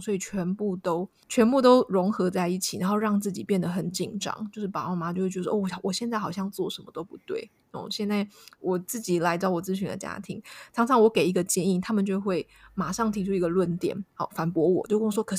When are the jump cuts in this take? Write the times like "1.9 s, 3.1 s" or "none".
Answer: 1.2 s